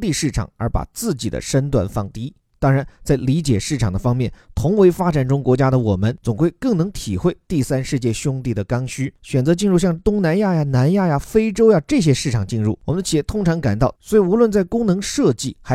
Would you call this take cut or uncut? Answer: cut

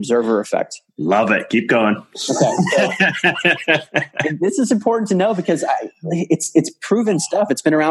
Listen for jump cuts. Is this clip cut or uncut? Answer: uncut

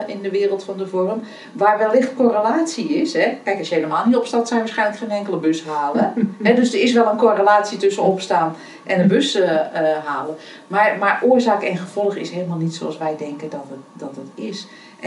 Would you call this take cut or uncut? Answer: uncut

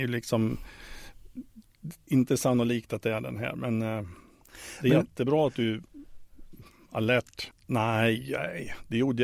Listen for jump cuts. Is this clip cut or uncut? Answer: cut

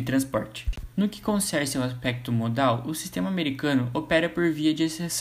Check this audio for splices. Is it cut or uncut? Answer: cut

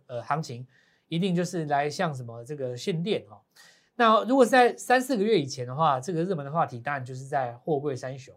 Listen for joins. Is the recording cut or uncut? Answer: uncut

